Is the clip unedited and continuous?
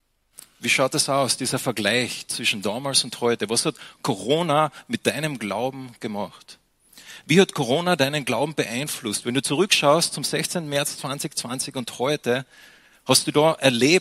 yes; 0 cuts

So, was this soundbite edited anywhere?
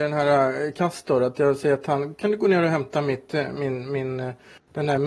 no; 0 cuts

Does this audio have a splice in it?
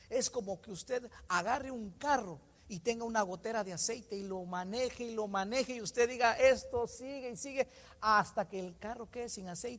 no; 0 cuts

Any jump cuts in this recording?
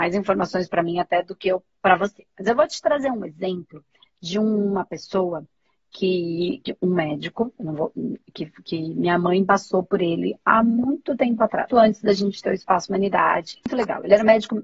yes; 1 cut; at 11.7 s

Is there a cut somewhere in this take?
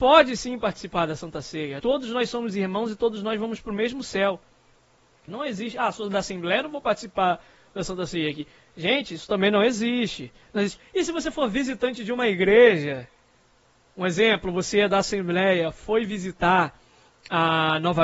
yes; 3 cuts; at 1.8 s, 5.3 s, 10.8 s

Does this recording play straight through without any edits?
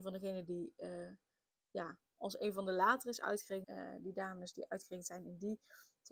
no; 1 cut; at 3.6 s

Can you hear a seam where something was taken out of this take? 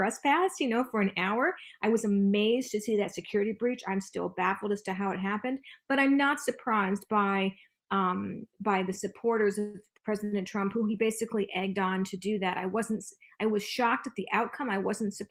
no; 0 cuts

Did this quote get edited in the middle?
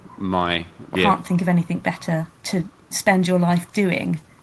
yes; 2 cuts; at 0.9 s, 2.3 s

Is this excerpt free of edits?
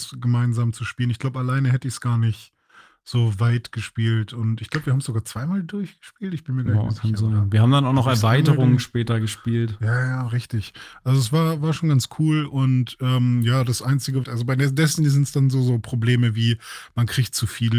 no; 1 cut; at 14.2 s

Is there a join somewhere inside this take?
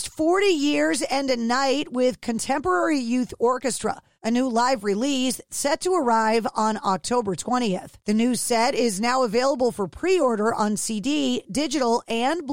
no; 0 cuts

